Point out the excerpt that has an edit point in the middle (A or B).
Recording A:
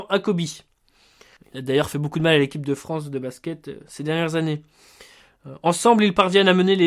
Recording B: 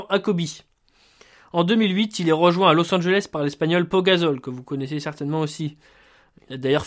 A